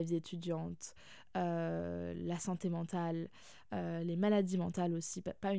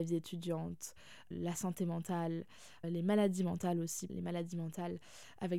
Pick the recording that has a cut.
second; 3 cuts; at 1.3 s, 2.8 s, 4.1 s

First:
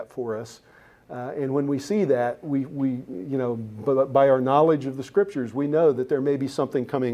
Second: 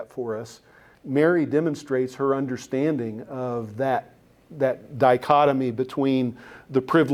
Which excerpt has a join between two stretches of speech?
second; 1 cut; at 0.9 s

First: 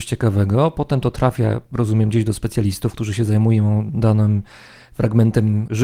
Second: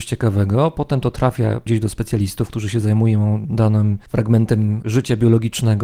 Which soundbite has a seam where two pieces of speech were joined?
second; 2 cuts; at 1.7 s, 4.1 s

